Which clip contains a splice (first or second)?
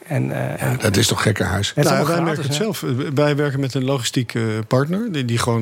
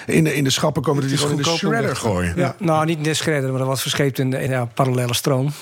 second